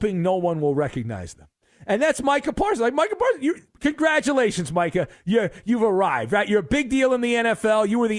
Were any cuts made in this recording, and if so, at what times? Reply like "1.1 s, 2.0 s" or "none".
none